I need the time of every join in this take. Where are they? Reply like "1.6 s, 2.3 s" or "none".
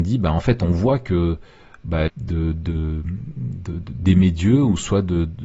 2.1 s